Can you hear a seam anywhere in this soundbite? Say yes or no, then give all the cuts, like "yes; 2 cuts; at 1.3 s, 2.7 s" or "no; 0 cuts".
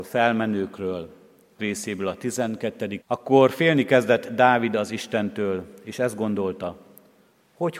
yes; 2 cuts; at 1.6 s, 3.0 s